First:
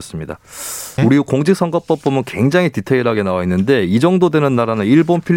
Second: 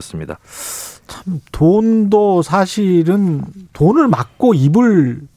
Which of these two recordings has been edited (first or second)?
first